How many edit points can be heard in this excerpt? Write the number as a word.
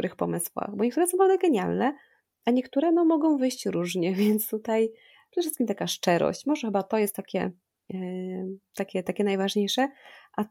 zero